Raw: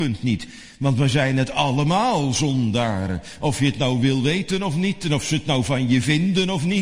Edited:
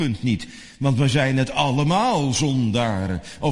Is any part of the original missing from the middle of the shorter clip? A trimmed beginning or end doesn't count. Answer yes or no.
no